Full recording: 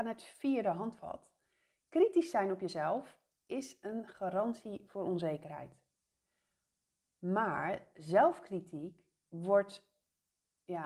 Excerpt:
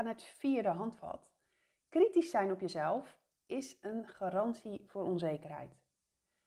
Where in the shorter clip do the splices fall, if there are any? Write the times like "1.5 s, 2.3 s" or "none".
none